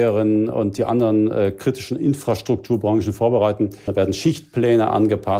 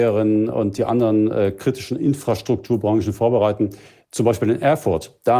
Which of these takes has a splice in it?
first; 1 cut; at 3.9 s

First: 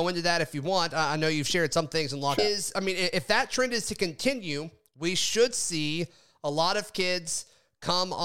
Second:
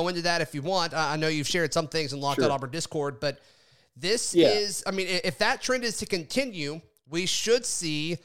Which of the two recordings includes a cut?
first; 1 cut; at 2.4 s

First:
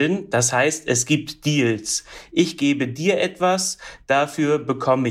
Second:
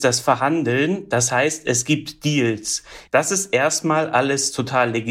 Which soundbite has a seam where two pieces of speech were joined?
second; 1 cut; at 3.1 s

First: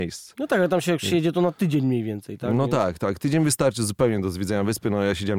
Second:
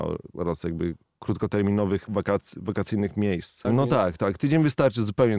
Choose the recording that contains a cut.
second; 1 cut; at 3.6 s

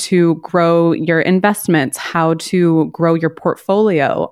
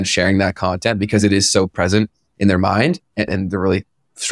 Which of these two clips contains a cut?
second; 1 cut; at 3.3 s

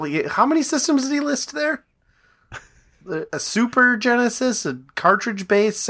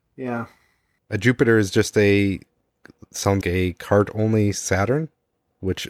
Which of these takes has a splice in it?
second; 1 cut; at 3.4 s

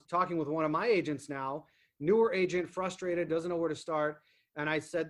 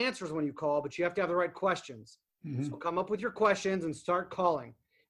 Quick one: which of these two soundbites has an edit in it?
first; 1 cut; at 3.3 s

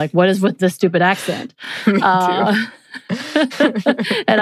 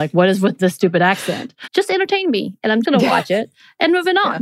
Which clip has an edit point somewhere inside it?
second; 2 cuts; at 1.6 s, 2.8 s

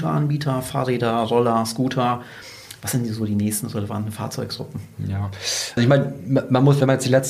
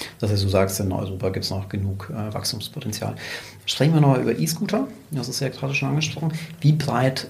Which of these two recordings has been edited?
first; 1 cut; at 5.8 s

